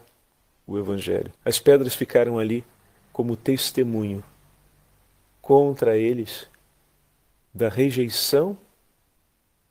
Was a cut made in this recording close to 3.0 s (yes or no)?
no